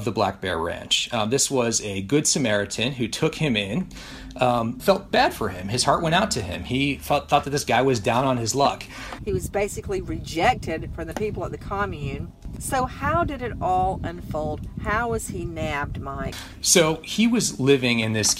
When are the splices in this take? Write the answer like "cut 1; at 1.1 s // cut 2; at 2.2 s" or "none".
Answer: cut 1; at 4.8 s // cut 2; at 9.2 s